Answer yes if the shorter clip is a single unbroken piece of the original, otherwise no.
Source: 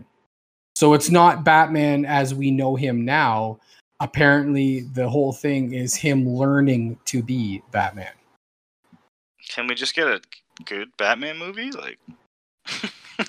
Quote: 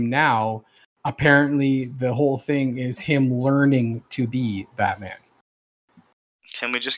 yes